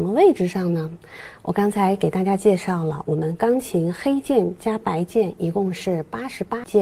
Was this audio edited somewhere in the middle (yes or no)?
no